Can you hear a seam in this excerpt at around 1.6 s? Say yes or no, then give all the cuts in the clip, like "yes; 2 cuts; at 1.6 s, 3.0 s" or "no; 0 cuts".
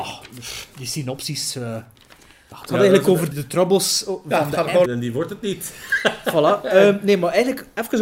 no; 2 cuts; at 3.3 s, 4.9 s